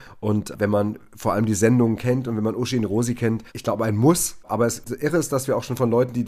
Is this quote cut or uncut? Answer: cut